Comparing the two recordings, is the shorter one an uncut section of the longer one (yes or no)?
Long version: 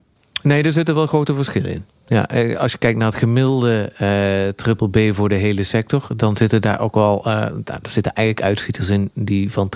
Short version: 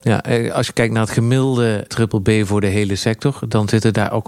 no